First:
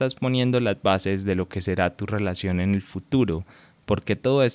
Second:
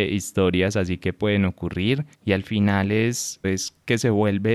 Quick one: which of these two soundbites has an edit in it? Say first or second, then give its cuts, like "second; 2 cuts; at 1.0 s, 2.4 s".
second; 2 cuts; at 2.1 s, 3.4 s